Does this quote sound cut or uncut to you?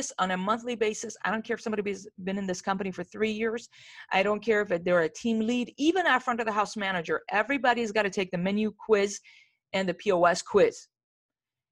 uncut